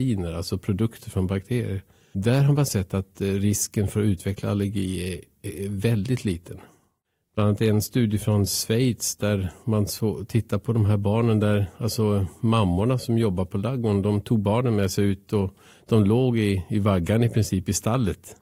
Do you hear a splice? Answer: no; 0 cuts

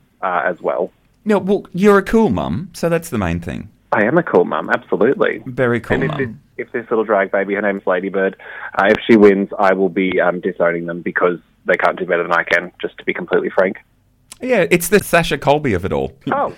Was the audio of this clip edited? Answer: no; 0 cuts

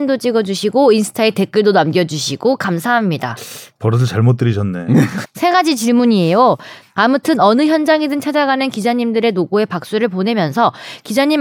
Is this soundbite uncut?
no; 2 cuts; at 5.2 s, 6.8 s

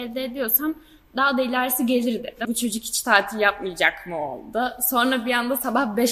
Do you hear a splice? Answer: yes; 1 cut; at 2.4 s

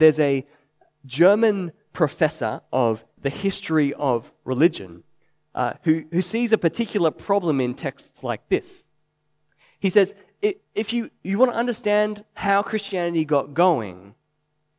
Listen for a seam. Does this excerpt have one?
yes; 1 cut; at 3.2 s

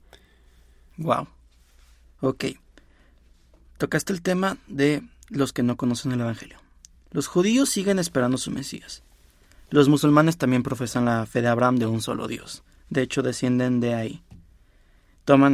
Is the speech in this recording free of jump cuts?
yes; 0 cuts

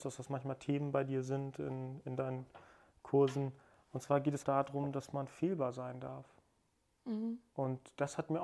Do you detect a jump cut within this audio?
yes; 1 cut; at 4.4 s

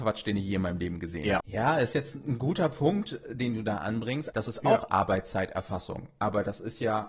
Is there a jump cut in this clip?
yes; 2 cuts; at 1.4 s, 4.3 s

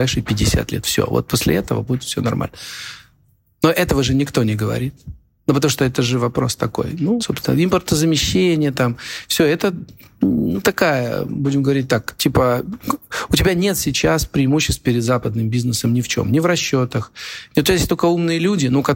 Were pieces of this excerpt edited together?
yes; 1 cut; at 7.2 s

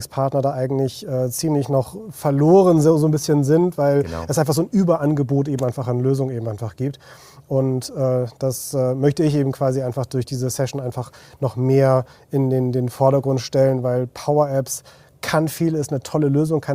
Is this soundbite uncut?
yes; 0 cuts

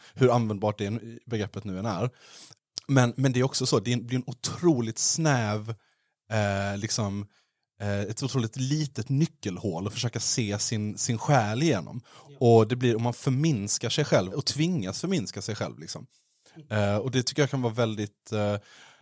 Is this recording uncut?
no; 1 cut; at 14.3 s

